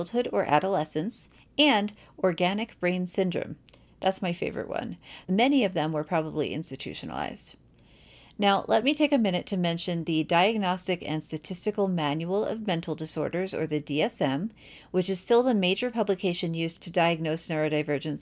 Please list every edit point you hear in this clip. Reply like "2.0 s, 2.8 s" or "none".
5.2 s